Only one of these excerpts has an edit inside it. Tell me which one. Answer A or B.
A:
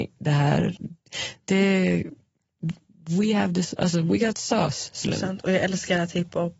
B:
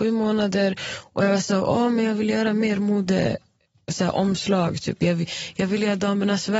A